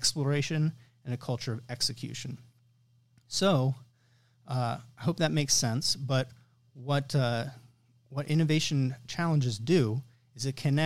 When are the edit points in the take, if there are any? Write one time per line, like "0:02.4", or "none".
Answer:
none

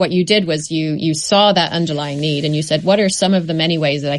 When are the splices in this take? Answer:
none

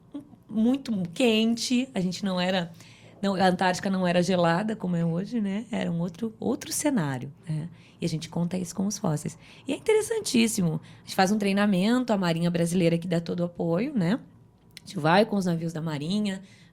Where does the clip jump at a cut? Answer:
none

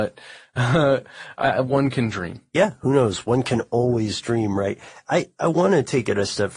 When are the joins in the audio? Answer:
none

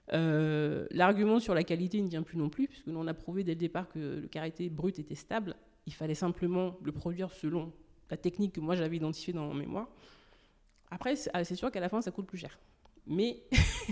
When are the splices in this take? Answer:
none

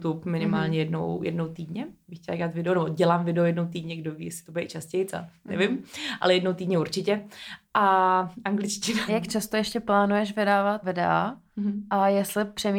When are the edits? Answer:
0:09.1
0:10.8

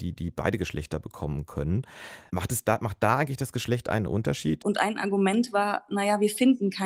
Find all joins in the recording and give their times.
0:02.3
0:04.6

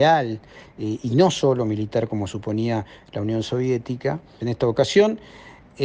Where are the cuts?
0:04.4

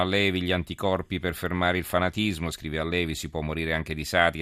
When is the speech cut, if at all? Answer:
none

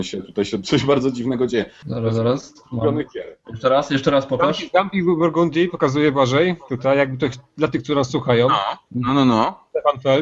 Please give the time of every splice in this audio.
0:01.8

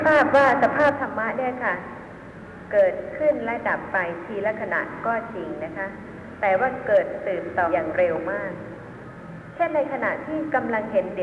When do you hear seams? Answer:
0:07.7

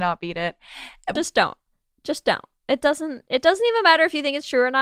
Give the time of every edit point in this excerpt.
0:01.2

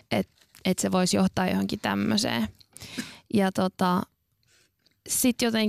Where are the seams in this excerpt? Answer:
none

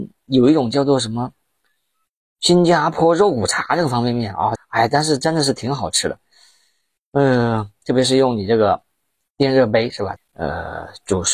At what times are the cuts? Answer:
0:04.6
0:10.2

